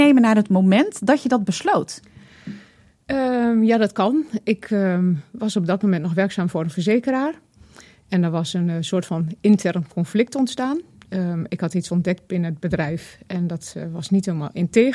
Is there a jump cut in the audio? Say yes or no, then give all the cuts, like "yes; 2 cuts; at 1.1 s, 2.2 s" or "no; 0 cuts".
no; 0 cuts